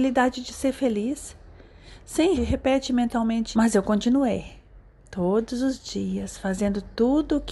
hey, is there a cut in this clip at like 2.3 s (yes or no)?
yes